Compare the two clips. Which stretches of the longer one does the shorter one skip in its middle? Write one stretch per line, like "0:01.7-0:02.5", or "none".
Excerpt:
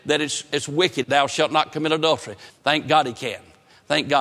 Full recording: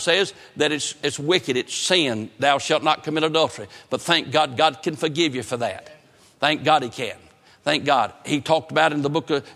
0:01.5-0:02.3
0:03.8-0:06.3

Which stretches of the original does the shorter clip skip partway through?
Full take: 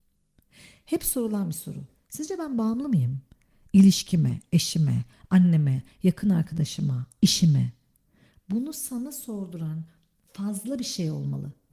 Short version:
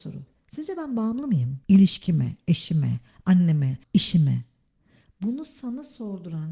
0:03.3-0:03.7
0:05.9-0:07.1

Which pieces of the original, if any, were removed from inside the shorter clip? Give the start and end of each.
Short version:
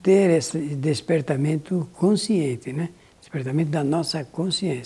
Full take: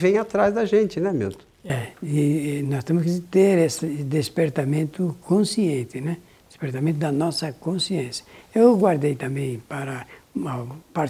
none

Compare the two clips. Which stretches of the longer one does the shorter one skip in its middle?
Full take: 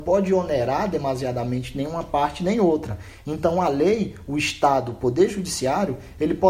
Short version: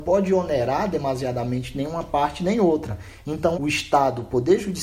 0:03.5-0:04.2

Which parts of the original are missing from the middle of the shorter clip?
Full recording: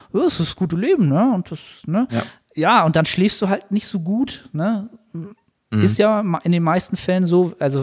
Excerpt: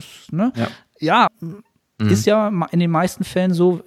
0:02.8-0:05.0

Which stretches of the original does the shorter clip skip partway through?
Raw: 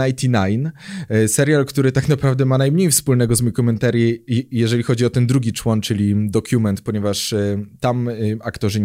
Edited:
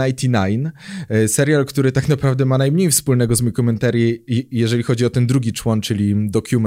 none

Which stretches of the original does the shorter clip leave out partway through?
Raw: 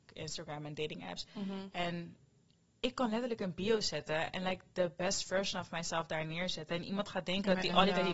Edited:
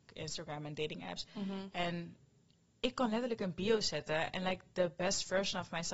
none

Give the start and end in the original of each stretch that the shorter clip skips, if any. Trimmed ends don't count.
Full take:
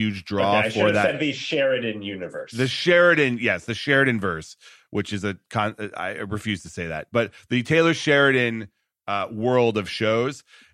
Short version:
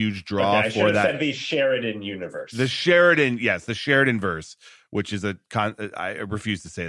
none

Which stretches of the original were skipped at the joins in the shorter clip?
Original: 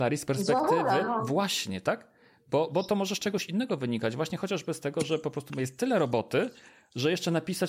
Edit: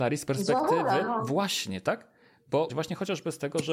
0:02.7-0:04.1

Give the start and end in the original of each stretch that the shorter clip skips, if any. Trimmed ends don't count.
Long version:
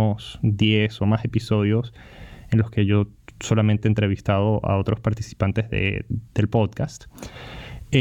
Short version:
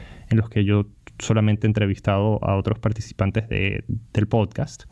none

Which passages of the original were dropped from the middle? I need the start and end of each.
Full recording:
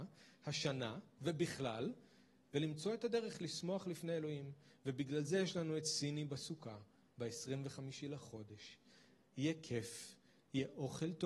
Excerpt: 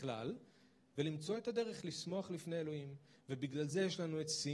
none

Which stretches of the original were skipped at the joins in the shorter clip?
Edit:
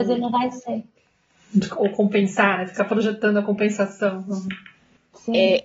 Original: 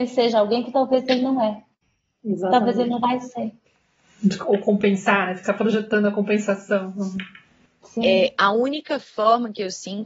none

